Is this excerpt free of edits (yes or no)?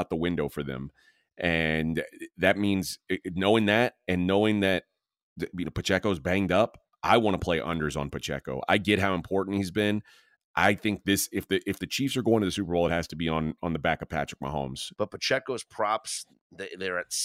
no